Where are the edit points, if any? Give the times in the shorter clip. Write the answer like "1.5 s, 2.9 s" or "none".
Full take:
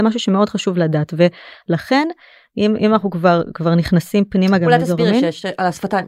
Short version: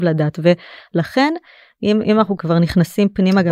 2.4 s